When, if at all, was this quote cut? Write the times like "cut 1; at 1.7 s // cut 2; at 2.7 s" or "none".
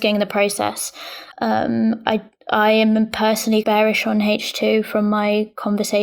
cut 1; at 1.3 s // cut 2; at 3.6 s